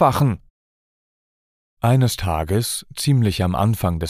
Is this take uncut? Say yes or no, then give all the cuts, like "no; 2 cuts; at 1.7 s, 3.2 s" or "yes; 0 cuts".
yes; 0 cuts